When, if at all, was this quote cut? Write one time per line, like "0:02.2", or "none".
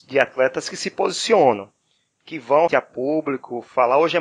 0:02.7